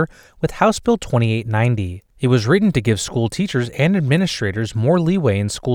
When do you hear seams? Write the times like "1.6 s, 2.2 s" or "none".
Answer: 2.1 s